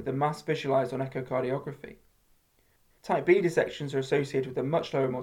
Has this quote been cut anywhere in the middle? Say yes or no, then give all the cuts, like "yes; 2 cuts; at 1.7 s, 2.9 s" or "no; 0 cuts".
yes; 1 cut; at 2.9 s